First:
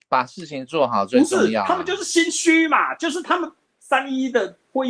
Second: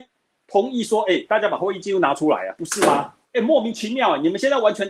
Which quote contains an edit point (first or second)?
second